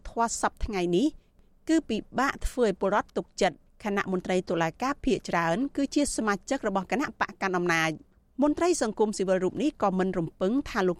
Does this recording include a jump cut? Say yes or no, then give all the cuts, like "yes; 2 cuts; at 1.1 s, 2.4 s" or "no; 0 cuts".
no; 0 cuts